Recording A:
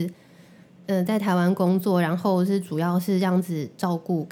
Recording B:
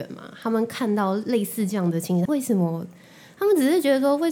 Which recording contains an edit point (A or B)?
B